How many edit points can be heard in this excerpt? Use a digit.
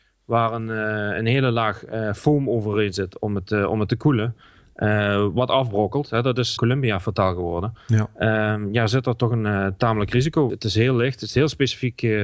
2